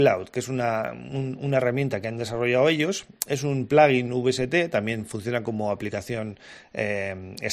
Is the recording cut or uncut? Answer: uncut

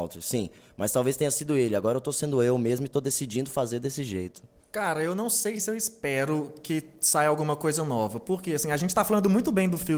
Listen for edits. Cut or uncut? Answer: cut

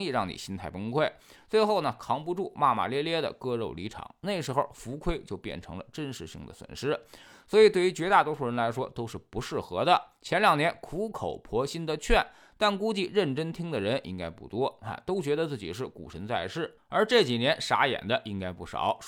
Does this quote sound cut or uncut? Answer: uncut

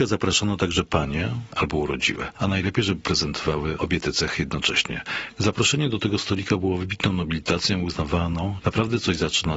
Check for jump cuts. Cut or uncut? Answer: cut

